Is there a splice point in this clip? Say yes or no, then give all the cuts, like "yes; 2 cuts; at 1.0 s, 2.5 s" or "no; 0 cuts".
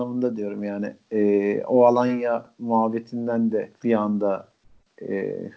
yes; 1 cut; at 3.8 s